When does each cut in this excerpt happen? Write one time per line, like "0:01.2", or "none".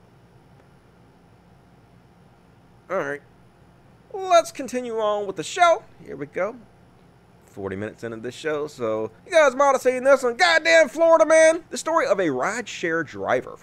0:09.2
0:11.6